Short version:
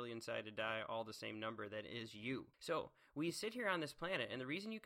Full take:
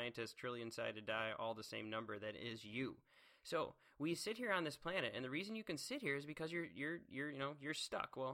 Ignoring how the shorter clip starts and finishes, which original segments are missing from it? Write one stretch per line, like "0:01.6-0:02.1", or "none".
0:03.0-0:03.4